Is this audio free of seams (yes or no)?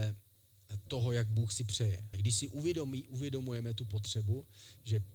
no